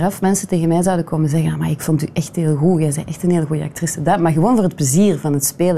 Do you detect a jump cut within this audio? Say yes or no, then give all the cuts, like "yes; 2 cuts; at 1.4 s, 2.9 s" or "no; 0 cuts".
no; 0 cuts